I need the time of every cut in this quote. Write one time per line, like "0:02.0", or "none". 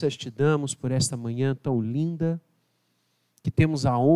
none